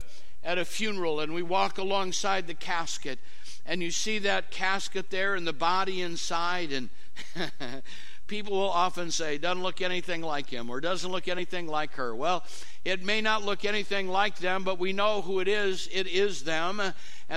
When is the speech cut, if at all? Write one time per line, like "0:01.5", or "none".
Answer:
none